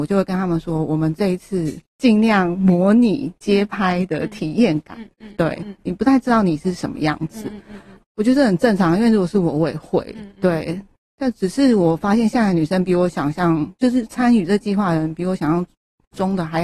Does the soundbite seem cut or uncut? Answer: cut